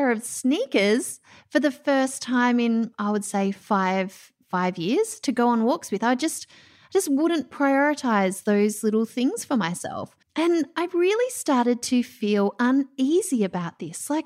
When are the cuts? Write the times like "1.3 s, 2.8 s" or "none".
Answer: 10.2 s